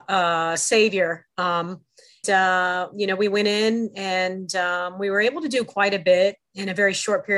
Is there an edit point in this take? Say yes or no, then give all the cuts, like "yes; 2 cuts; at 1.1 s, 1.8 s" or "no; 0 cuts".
yes; 1 cut; at 2.2 s